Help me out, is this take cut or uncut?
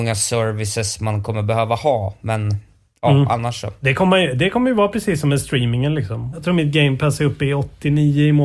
cut